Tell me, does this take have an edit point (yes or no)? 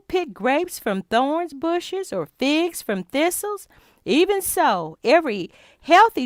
no